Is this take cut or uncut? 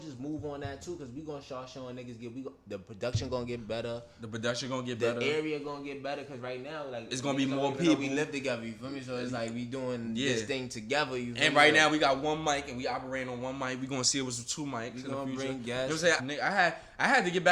cut